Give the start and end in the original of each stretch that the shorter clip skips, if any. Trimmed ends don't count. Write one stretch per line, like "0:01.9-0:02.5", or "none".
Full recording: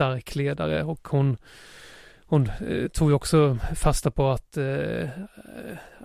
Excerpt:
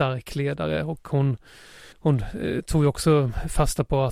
0:01.9-0:02.2